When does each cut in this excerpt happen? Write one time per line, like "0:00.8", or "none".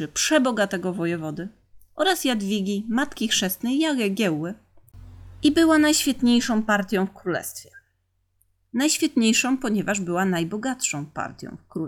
none